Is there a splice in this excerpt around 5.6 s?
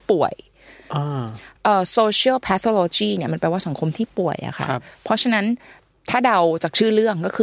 no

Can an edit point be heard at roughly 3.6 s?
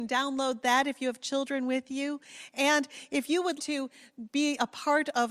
yes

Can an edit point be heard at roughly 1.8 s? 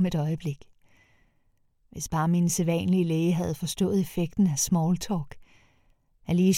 no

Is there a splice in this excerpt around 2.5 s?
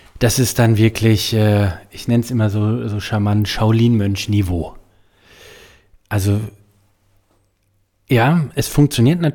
no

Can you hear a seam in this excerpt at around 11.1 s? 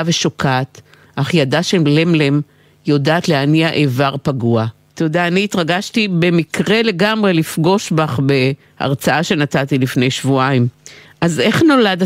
no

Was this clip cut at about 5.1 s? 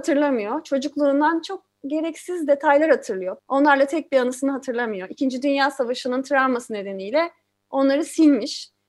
no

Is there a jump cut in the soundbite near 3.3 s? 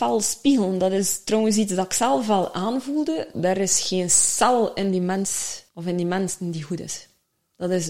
yes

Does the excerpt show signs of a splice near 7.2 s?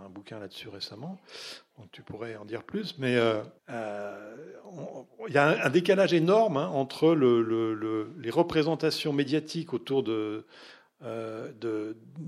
no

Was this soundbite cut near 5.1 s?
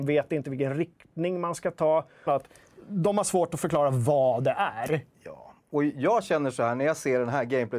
no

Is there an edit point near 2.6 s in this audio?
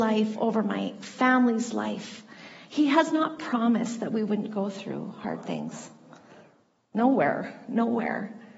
yes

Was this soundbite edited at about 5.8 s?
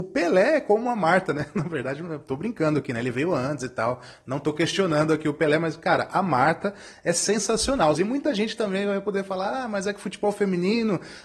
no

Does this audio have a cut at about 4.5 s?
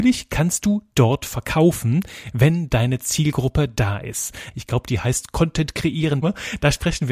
yes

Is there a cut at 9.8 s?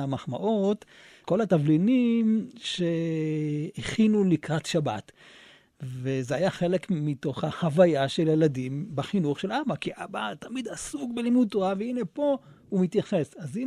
no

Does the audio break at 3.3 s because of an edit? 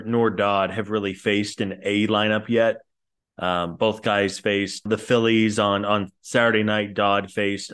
no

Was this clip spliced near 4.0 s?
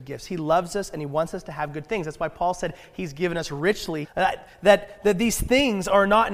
yes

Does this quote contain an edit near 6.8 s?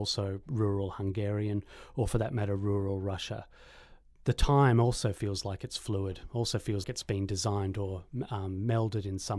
yes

